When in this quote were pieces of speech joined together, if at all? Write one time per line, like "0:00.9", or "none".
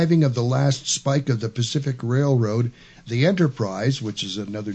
none